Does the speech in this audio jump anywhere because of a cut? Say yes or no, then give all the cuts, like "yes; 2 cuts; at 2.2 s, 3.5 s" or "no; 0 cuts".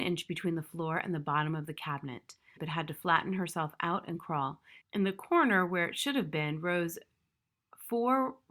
yes; 2 cuts; at 2.6 s, 4.8 s